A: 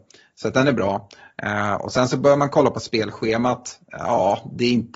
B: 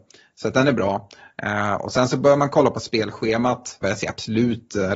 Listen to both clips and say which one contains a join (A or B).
B